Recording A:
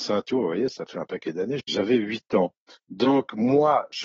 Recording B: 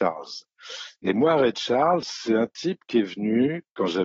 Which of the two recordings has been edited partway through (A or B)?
A